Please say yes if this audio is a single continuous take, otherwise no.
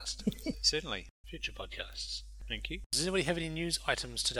no